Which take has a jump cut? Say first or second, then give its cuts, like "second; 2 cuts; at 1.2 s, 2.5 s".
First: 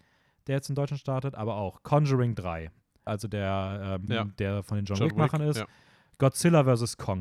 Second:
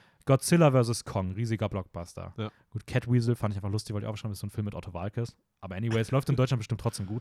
first; 2 cuts; at 3.1 s, 4.1 s